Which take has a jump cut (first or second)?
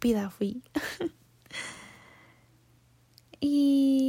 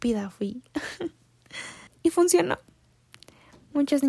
second